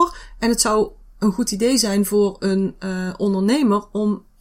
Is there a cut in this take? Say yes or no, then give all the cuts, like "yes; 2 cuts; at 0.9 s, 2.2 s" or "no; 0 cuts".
no; 0 cuts